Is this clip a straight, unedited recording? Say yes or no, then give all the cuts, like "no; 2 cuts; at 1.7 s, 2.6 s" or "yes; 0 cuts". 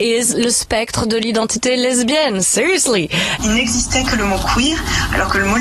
no; 1 cut; at 3.4 s